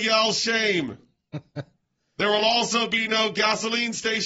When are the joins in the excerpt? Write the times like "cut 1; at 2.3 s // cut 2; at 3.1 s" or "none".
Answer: none